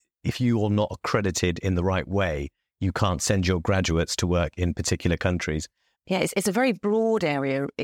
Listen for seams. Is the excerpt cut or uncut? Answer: cut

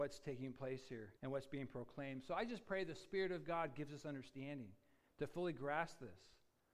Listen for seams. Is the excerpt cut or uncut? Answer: cut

